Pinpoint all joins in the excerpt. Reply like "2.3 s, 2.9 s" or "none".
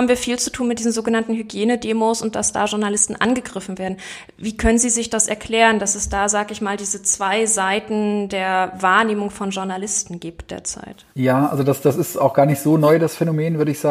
11.1 s